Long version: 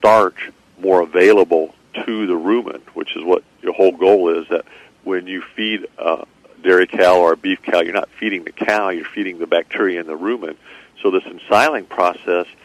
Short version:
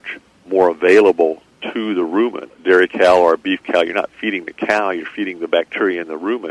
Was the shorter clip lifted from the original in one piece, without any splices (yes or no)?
no